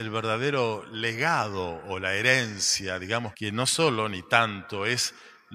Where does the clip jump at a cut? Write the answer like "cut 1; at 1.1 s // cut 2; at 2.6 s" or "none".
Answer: cut 1; at 3.3 s

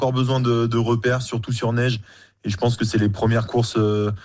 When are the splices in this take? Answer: none

